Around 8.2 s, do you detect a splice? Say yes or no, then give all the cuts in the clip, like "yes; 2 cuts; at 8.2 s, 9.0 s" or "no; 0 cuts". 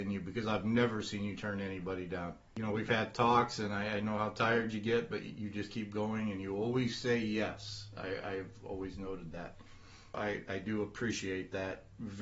no; 1 cut; at 10.1 s